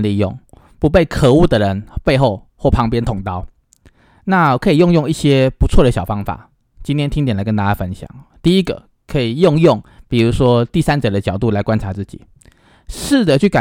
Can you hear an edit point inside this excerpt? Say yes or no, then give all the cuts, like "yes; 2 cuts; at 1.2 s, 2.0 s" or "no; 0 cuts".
no; 0 cuts